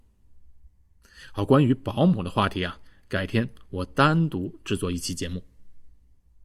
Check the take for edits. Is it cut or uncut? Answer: uncut